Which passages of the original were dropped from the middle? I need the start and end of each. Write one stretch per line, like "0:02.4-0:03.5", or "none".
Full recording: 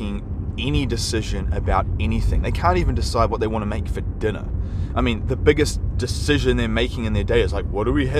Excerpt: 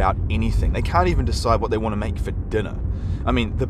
none

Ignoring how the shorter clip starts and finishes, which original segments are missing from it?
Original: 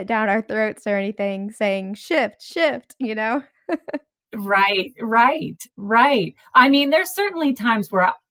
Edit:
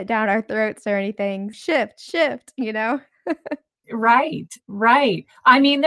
0:01.5-0:02.0
0:04.3-0:04.9

